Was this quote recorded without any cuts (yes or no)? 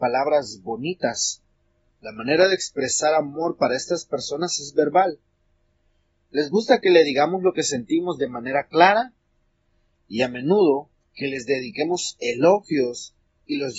no